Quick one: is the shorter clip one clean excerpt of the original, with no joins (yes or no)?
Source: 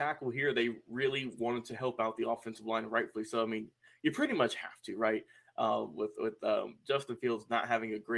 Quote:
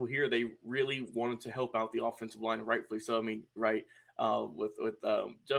no